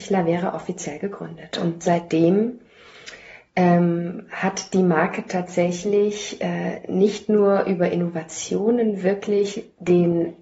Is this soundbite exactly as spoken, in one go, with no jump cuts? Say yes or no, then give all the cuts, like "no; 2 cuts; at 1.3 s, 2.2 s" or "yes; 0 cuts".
yes; 0 cuts